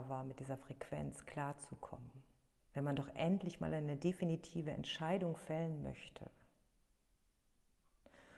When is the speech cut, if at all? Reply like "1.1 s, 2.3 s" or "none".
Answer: 2.6 s